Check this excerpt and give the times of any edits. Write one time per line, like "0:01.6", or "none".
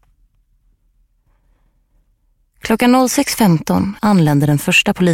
0:04.0